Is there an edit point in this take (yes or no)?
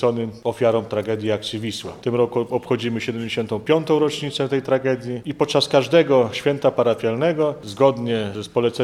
no